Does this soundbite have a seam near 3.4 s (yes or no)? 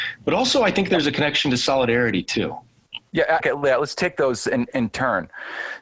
yes